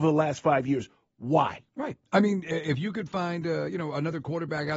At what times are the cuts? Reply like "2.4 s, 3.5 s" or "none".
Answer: none